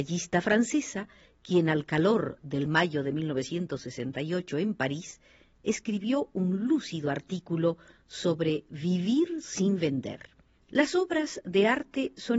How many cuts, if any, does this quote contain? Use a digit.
1